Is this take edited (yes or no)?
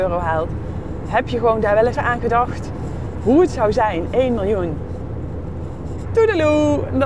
yes